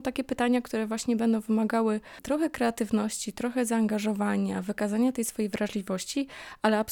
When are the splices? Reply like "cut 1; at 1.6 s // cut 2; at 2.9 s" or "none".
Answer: none